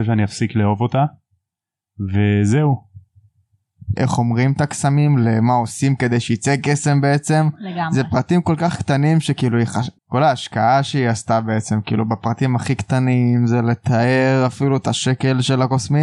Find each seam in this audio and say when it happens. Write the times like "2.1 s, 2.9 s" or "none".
4.0 s, 10.0 s